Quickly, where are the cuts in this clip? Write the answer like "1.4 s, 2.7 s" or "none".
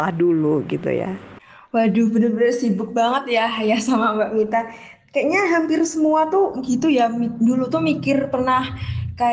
none